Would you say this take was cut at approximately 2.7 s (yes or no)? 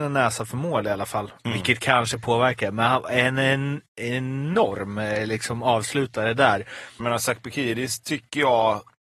no